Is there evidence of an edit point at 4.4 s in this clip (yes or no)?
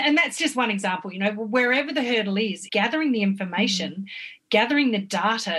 no